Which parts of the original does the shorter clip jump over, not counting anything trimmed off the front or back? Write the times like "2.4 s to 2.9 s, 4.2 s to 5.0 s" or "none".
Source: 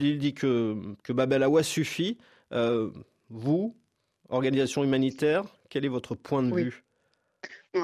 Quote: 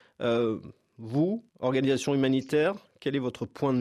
3.8 s to 4.2 s